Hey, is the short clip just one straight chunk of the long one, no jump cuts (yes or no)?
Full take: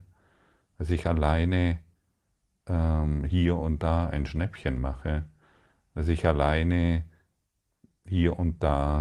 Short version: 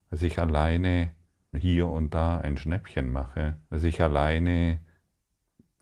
no